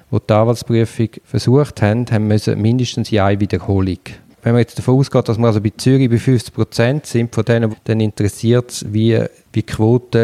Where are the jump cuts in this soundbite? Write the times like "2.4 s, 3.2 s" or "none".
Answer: 7.7 s